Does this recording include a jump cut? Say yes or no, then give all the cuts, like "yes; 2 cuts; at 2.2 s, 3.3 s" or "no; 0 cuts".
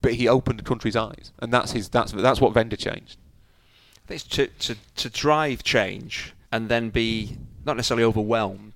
yes; 2 cuts; at 4.2 s, 6.4 s